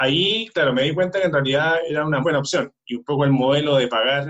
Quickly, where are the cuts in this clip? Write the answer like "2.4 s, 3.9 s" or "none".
2.2 s